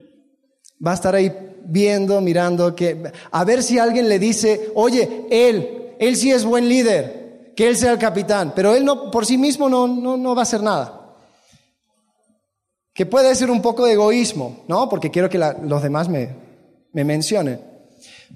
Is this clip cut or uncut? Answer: uncut